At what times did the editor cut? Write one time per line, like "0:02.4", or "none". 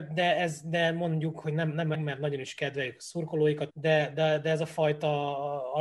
0:01.9
0:03.7